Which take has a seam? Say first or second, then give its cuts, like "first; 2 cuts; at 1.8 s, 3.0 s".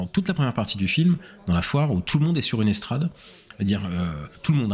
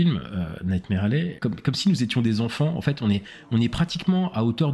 second; 1 cut; at 1.4 s